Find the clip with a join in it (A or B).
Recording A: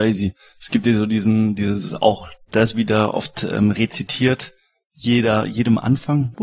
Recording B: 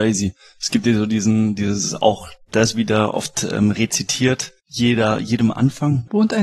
B